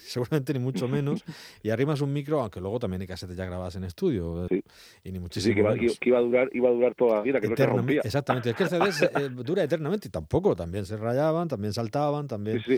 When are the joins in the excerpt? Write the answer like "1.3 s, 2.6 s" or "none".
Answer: 4.5 s